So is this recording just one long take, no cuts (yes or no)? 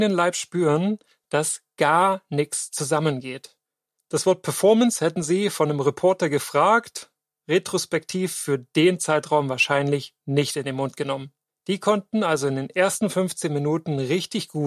no